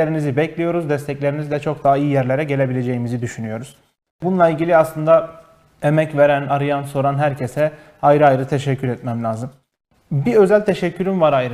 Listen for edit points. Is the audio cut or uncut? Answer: uncut